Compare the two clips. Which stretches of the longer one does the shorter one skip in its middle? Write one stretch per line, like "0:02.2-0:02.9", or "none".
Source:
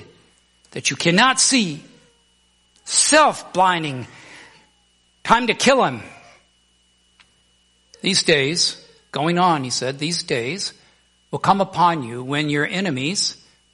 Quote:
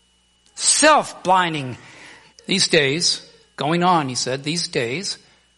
0:04.6-0:07.9